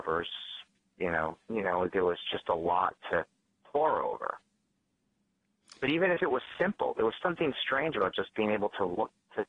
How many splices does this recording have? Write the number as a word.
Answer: two